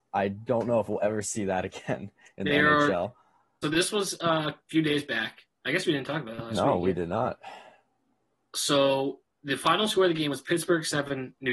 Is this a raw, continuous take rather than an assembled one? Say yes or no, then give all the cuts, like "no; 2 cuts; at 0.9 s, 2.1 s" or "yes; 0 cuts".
no; 1 cut; at 3.6 s